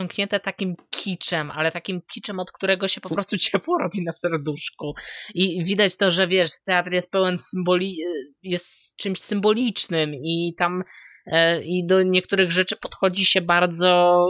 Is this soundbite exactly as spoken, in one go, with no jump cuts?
yes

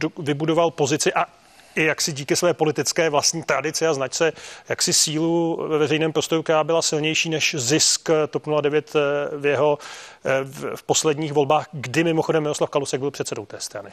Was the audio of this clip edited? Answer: no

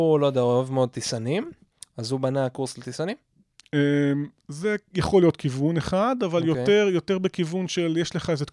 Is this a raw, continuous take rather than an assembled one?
yes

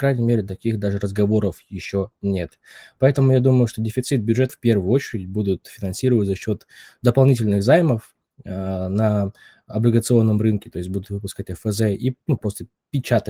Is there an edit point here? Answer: yes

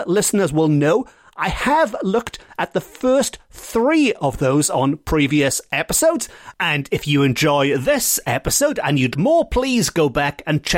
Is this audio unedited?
no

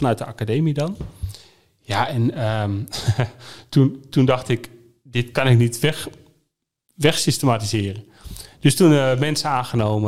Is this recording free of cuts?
yes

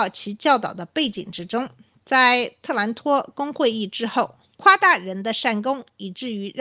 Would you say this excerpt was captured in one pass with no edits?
no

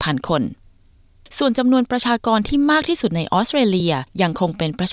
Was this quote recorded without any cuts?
yes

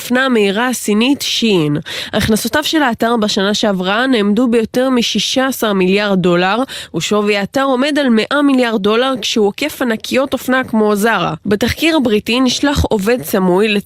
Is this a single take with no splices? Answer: yes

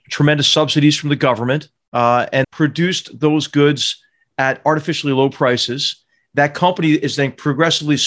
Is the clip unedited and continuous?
no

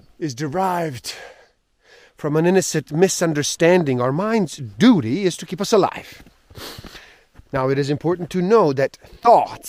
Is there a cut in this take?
yes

